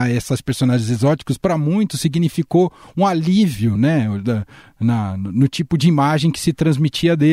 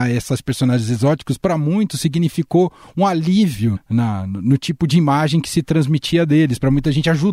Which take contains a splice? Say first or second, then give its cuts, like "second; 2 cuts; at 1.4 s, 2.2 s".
second; 1 cut; at 3.8 s